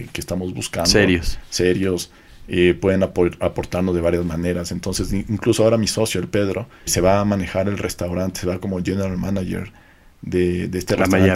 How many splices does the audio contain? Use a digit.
1